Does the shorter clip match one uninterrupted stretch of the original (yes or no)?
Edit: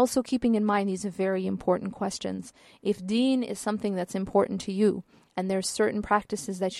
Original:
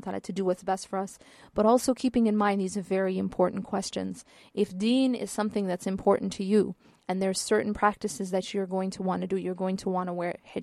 yes